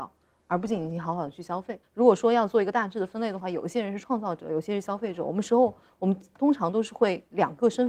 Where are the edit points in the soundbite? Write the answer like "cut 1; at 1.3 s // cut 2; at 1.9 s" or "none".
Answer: cut 1; at 1.8 s